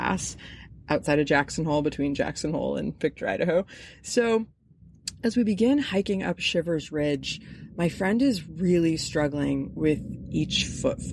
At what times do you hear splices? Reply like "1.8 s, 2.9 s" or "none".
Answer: none